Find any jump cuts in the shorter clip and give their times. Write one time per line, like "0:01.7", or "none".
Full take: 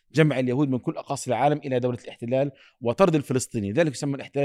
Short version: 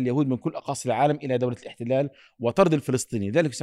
none